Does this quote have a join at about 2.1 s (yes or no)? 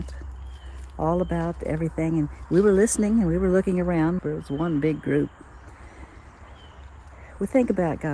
no